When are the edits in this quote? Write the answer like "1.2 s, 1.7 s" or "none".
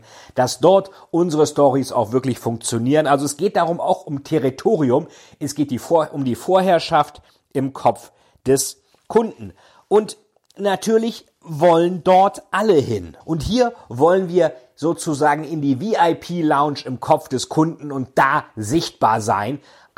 13.2 s

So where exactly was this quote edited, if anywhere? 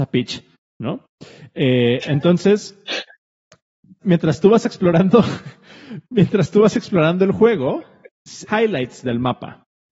4.0 s, 8.5 s

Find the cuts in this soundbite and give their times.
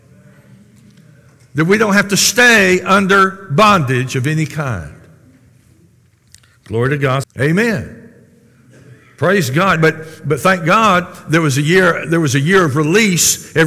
7.2 s, 9.8 s

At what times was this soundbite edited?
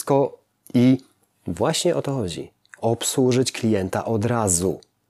none

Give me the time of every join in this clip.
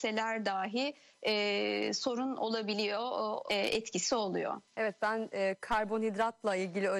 3.5 s, 4.7 s

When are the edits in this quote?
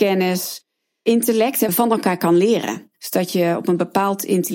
1.7 s

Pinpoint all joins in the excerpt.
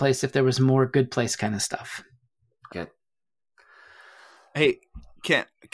2.7 s

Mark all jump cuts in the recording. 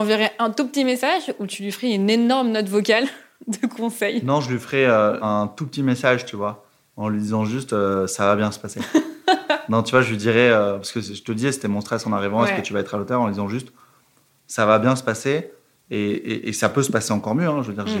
none

